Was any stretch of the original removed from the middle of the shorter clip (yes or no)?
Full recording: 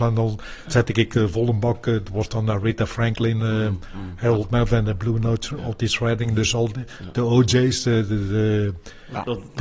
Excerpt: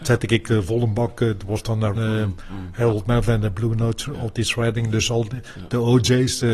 yes